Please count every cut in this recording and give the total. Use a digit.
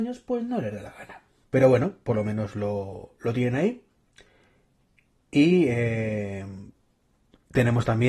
1